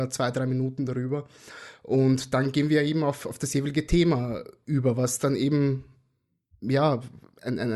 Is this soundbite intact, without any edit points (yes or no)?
yes